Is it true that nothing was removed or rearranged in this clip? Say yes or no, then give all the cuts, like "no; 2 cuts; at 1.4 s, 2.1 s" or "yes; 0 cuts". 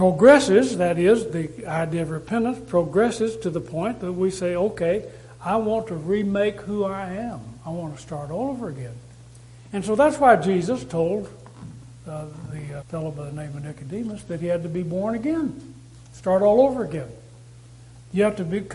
no; 1 cut; at 12.8 s